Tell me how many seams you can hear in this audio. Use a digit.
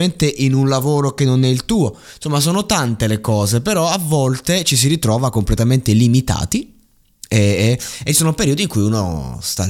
0